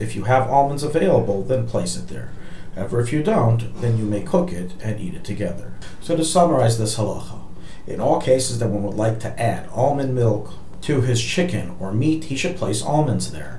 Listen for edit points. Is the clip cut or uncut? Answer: uncut